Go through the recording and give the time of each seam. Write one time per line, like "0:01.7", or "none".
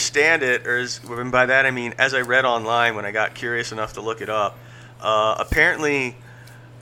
none